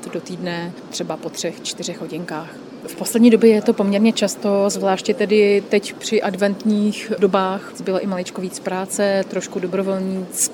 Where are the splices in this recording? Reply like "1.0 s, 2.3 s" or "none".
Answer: 2.8 s, 7.7 s